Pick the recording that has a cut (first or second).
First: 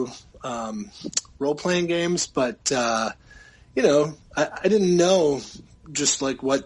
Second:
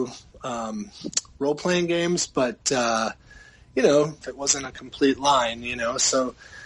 second